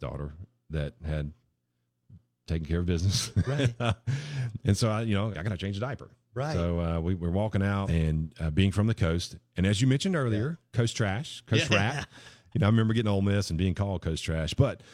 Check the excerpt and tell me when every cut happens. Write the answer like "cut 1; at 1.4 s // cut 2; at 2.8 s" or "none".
cut 1; at 5.3 s // cut 2; at 7.9 s